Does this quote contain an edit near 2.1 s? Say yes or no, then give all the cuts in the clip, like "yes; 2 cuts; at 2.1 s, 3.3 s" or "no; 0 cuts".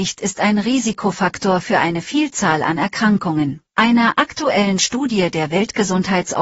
no; 1 cut; at 3.7 s